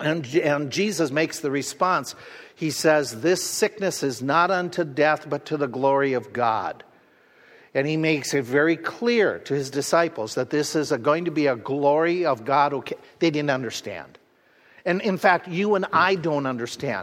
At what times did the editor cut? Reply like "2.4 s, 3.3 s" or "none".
none